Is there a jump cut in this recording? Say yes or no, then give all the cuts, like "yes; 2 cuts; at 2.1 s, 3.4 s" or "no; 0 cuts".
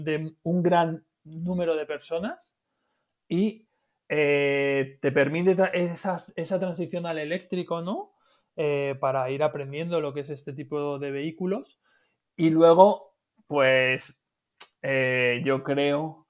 no; 0 cuts